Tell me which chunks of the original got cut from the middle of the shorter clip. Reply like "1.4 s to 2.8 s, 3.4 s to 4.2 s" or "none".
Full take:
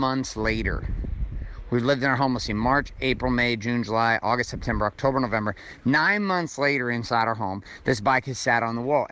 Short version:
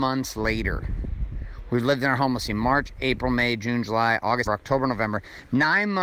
4.5 s to 4.8 s